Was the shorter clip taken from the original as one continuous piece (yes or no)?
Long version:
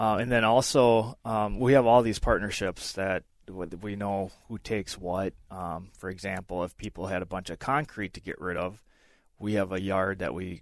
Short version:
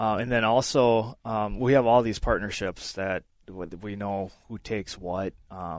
yes